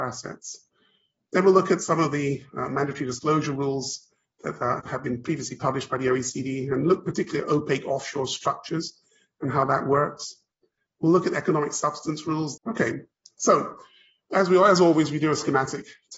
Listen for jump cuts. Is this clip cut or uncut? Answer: cut